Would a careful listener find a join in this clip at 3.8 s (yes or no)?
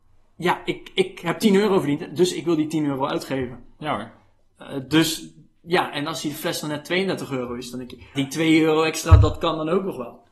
yes